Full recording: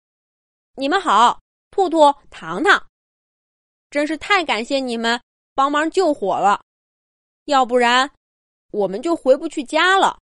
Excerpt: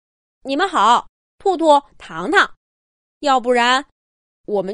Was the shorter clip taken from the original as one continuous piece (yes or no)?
no